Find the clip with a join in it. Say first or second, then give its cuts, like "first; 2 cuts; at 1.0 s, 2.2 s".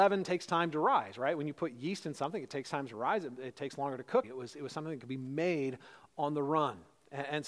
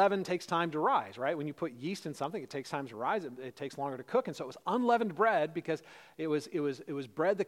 first; 1 cut; at 4.2 s